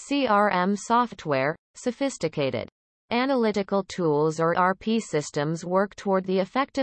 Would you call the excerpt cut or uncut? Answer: cut